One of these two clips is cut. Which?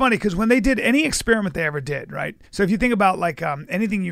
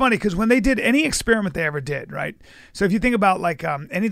first; 1 cut; at 2.5 s

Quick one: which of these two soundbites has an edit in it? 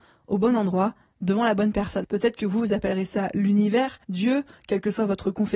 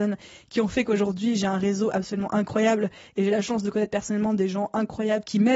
first; 2 cuts; at 2.0 s, 4.0 s

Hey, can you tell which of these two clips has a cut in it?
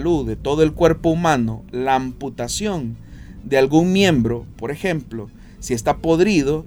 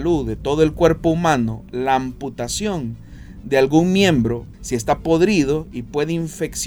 second; 1 cut; at 4.5 s

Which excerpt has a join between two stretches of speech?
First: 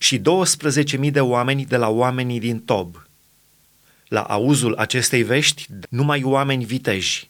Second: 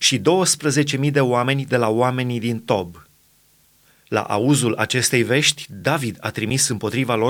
first; 1 cut; at 5.8 s

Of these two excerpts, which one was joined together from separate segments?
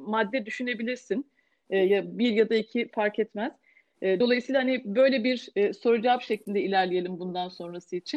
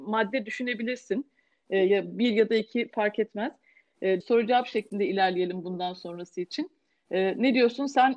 second; 1 cut; at 4.2 s

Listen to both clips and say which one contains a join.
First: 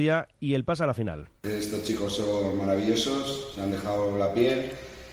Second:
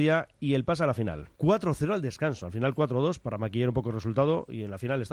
second; 1 cut; at 1.4 s

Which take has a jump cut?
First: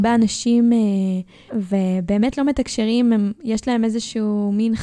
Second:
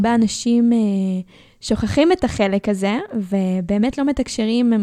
first; 1 cut; at 1.5 s

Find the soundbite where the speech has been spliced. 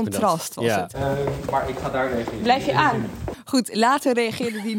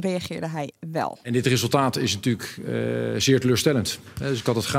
first; 1 cut; at 0.9 s

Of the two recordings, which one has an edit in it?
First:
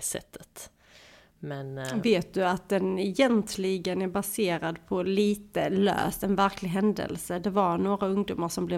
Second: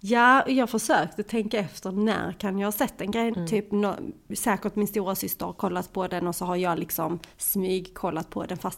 second; 1 cut; at 3.3 s

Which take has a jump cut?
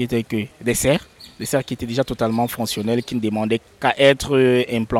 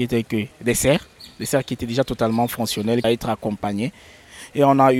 second; 1 cut; at 3.0 s

